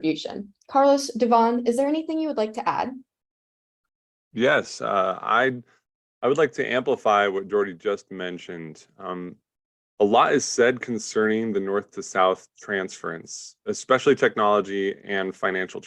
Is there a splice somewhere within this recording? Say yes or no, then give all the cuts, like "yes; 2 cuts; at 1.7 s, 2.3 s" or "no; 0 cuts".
no; 0 cuts